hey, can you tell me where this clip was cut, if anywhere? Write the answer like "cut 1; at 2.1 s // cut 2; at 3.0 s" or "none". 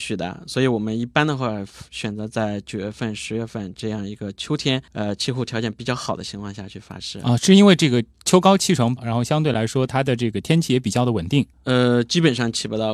cut 1; at 4.9 s // cut 2; at 9.0 s // cut 3; at 11.5 s